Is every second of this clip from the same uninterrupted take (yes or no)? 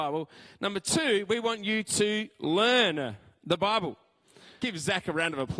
no